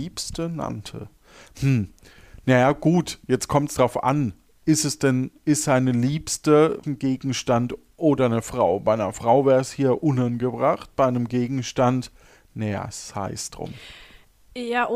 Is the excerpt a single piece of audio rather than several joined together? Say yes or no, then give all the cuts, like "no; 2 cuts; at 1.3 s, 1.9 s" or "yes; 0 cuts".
no; 1 cut; at 6.8 s